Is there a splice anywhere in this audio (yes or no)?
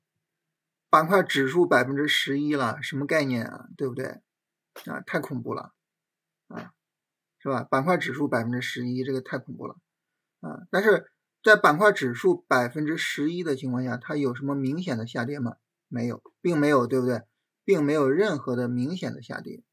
no